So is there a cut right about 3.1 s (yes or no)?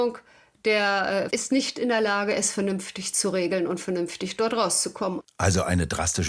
no